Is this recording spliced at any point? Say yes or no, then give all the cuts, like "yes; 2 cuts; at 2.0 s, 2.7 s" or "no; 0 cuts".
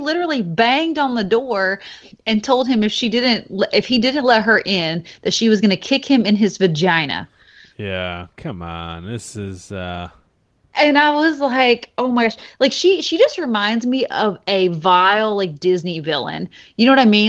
no; 0 cuts